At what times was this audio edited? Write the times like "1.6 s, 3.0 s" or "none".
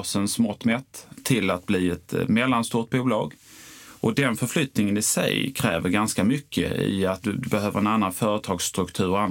none